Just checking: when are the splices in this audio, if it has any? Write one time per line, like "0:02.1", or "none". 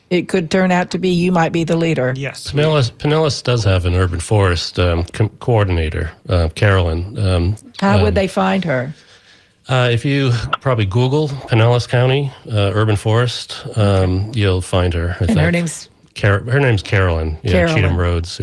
none